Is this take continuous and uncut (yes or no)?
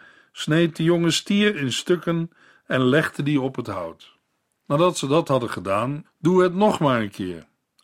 no